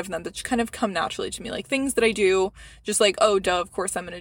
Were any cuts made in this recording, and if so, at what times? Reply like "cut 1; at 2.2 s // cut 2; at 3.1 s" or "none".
none